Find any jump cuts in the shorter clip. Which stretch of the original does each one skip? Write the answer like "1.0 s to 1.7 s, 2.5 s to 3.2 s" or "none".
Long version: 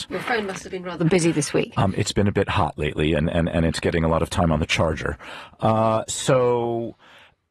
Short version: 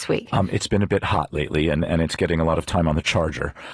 3.3 s to 3.5 s